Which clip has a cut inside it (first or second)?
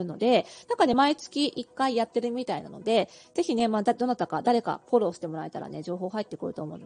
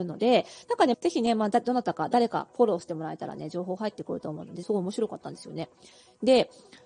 second